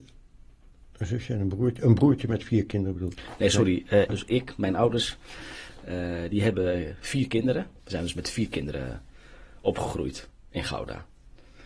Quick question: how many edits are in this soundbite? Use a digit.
2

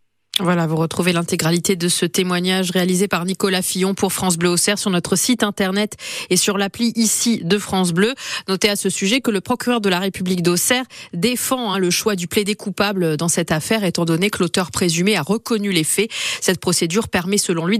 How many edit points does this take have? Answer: 0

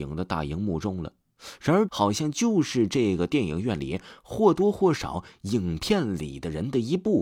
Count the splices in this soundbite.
1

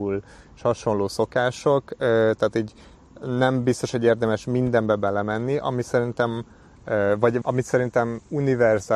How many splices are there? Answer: 1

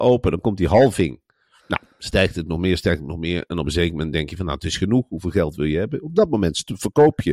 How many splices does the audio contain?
0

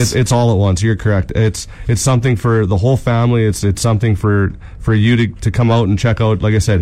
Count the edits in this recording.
0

